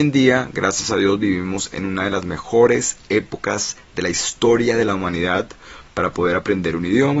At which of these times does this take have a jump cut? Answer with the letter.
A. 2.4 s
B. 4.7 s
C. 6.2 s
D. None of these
D